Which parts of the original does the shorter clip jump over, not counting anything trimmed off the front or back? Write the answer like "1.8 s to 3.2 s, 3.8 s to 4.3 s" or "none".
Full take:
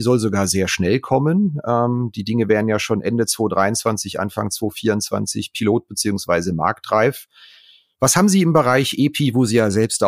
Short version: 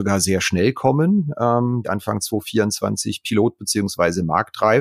2.1 s to 4.1 s